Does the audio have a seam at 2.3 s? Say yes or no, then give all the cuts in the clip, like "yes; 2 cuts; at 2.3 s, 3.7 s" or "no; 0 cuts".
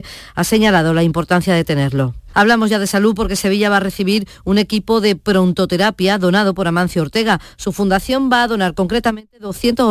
yes; 1 cut; at 2.3 s